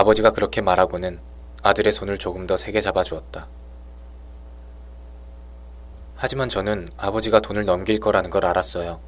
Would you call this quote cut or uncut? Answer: uncut